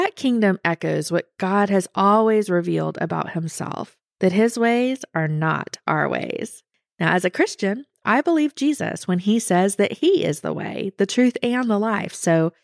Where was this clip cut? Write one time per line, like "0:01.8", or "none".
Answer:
none